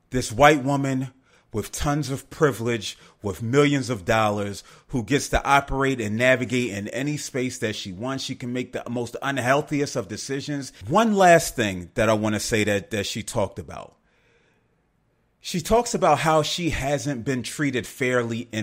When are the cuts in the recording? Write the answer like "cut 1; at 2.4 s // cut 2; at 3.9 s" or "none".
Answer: cut 1; at 10.8 s